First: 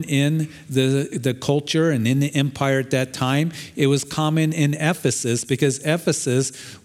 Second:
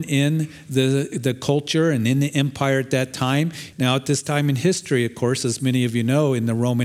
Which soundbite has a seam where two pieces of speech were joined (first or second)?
second